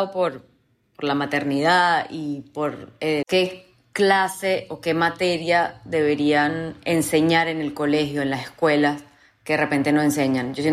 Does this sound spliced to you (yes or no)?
yes